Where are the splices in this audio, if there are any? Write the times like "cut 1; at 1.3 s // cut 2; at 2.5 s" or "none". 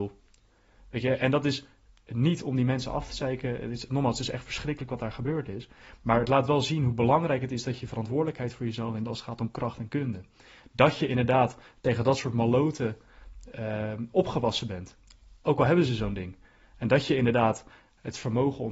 none

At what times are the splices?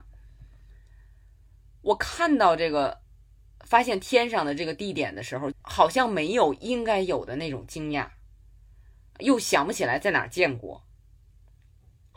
cut 1; at 5.5 s

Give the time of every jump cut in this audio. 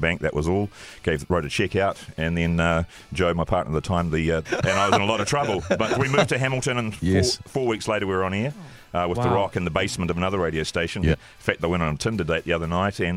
cut 1; at 4.4 s // cut 2; at 11.1 s

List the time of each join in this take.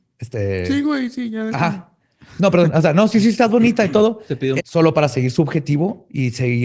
cut 1; at 4.6 s

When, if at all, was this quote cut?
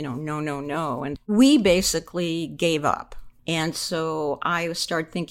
cut 1; at 1.2 s // cut 2; at 3.4 s

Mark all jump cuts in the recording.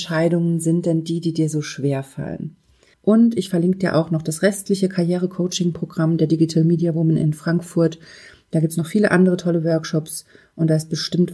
cut 1; at 2.9 s

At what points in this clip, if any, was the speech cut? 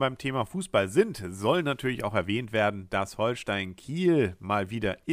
none

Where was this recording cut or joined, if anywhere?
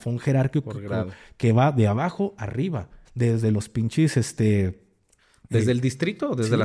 cut 1; at 3.0 s

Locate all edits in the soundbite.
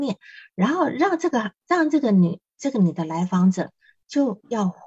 none

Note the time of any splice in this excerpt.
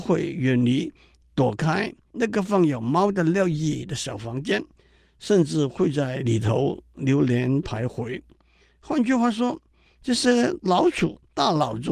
none

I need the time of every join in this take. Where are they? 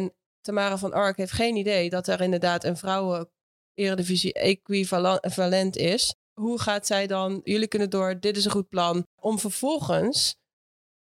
cut 1; at 7.4 s // cut 2; at 9.1 s

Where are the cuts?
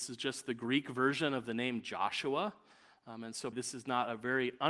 cut 1; at 3.5 s

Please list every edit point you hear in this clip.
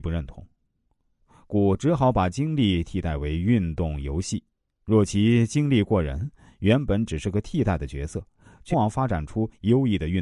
cut 1; at 8.7 s

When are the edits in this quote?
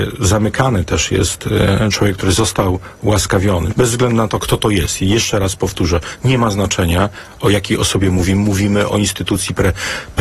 cut 1; at 3.7 s

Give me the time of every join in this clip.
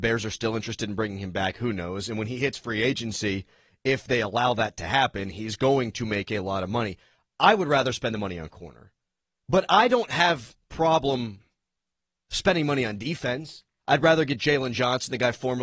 cut 1; at 13.8 s

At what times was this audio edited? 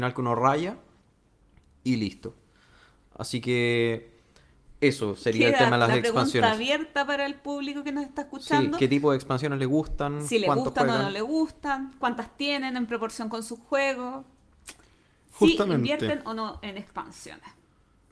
none

